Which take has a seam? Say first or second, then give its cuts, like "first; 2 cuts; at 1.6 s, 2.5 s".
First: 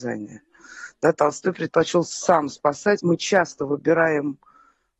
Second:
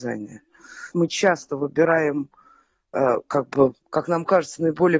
second; 1 cut; at 0.9 s